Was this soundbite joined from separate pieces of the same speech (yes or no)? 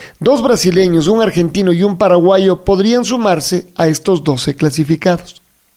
no